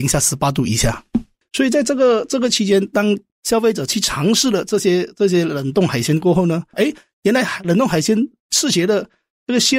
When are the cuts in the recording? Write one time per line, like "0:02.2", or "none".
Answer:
0:06.7